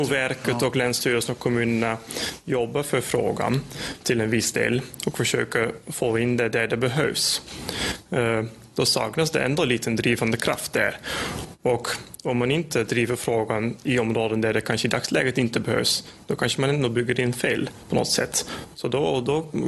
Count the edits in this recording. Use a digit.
0